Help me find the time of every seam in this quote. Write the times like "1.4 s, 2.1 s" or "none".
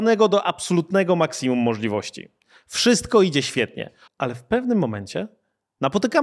4.1 s